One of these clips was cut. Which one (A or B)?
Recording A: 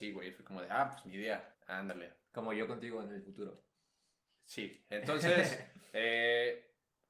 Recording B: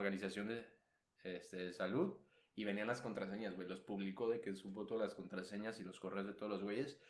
A